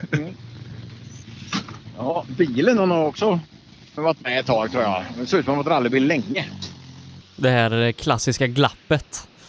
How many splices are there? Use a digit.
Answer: 2